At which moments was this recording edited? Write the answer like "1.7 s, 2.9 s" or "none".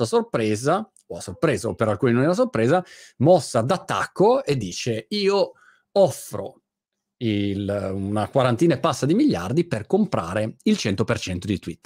none